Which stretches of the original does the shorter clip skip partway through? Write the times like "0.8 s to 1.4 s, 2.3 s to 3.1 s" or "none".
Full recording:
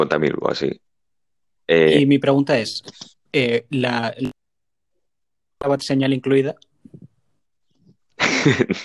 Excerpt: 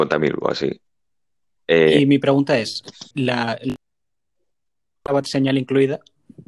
3.1 s to 3.7 s